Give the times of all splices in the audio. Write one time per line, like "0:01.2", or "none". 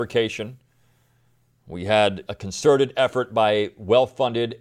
0:02.3

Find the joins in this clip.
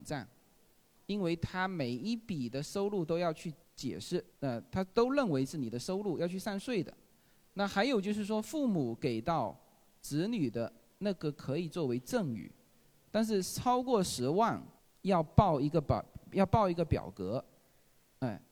0:04.3

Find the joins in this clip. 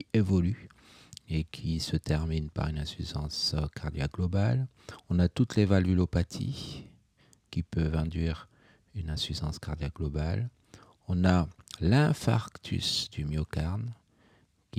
none

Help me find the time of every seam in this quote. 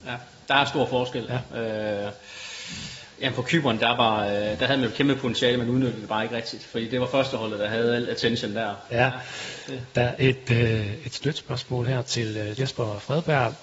0:08.9
0:10.2
0:12.6

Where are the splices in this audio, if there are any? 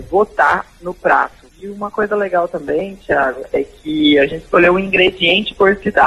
0:01.5

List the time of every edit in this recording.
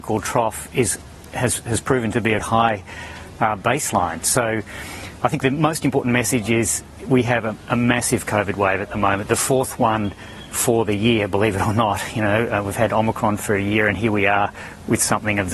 0:02.4

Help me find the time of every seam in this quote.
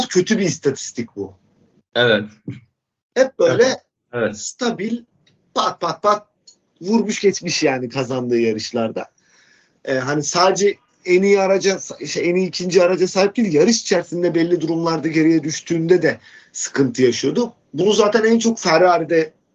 0:03.0

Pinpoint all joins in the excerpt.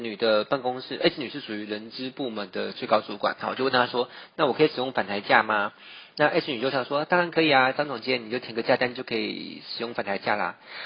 0:06.7

